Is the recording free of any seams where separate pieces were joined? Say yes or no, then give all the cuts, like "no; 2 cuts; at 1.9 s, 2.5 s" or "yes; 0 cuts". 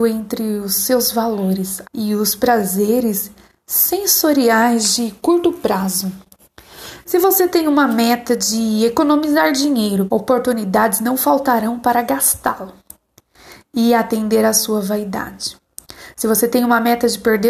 no; 3 cuts; at 1.8 s, 7.0 s, 10.1 s